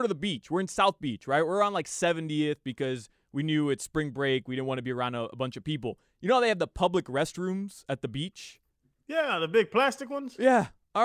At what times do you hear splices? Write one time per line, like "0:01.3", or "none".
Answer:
none